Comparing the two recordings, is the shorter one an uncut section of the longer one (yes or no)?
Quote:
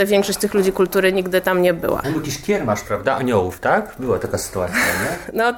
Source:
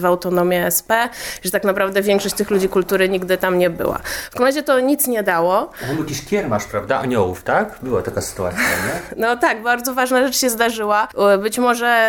no